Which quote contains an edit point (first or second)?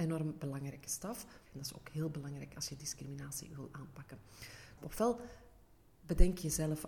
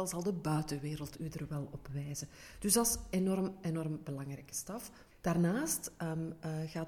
first